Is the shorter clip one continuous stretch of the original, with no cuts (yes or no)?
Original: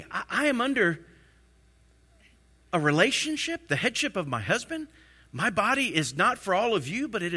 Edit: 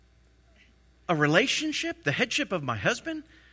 yes